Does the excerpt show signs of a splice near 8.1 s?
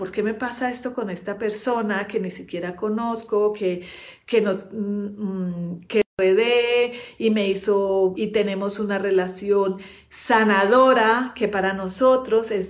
yes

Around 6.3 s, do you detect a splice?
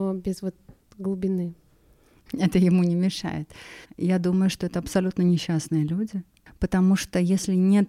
no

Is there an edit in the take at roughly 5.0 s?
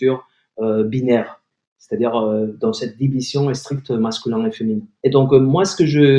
yes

